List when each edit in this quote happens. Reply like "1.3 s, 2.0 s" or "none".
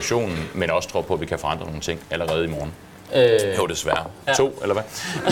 3.1 s, 4.3 s